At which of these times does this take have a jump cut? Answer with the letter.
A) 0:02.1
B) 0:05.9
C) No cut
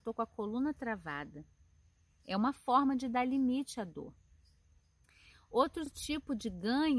C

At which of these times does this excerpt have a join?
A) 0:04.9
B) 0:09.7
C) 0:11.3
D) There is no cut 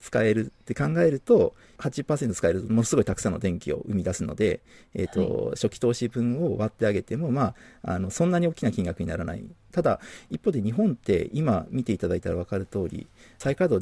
B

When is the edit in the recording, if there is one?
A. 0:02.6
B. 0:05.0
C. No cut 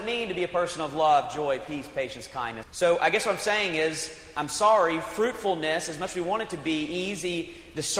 A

